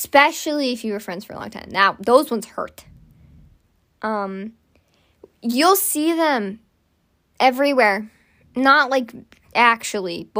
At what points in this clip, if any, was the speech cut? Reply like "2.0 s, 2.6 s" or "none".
none